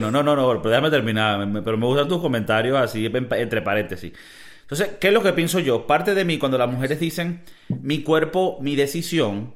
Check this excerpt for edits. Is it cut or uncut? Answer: uncut